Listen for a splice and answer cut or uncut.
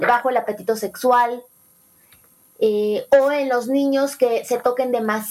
uncut